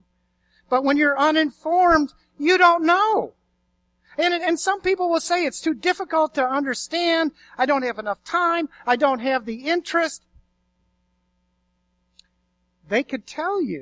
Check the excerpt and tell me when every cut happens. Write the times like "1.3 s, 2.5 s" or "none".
none